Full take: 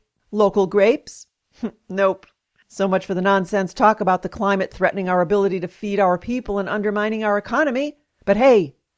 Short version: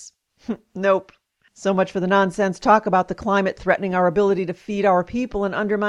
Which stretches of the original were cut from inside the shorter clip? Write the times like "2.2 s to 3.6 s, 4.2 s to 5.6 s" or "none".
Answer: none